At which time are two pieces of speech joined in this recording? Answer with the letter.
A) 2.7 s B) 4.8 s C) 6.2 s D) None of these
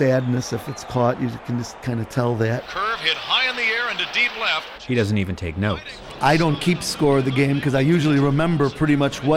B